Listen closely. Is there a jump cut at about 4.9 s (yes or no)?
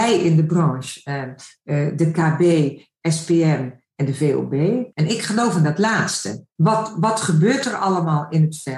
yes